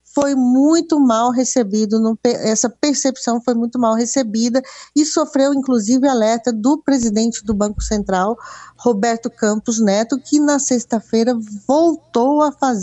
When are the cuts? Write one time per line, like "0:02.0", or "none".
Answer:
none